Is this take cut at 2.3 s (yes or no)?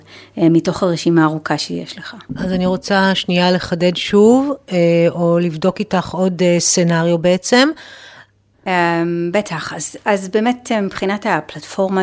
no